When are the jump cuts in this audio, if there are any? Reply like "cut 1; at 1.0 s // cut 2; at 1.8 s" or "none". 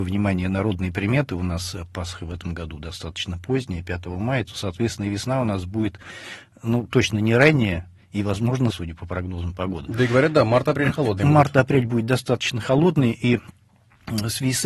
cut 1; at 8.7 s